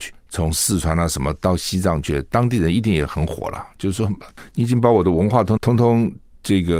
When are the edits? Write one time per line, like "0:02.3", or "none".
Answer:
0:05.6